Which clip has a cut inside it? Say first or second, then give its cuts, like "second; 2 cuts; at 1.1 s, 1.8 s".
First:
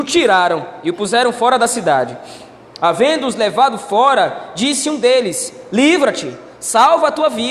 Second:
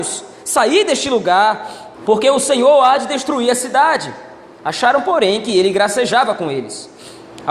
second; 1 cut; at 1.9 s